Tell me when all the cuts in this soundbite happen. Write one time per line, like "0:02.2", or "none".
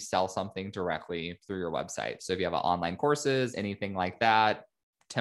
0:02.2
0:03.5